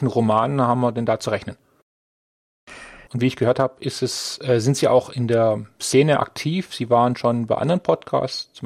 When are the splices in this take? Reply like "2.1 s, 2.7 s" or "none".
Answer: 3.1 s